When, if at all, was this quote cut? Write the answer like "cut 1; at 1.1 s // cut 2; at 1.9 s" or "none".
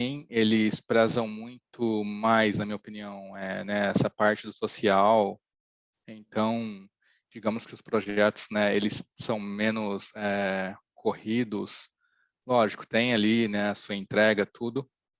none